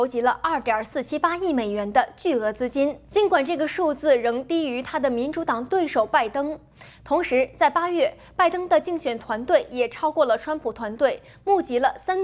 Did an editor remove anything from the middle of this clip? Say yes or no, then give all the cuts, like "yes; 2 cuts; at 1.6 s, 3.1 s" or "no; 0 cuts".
yes; 1 cut; at 6.9 s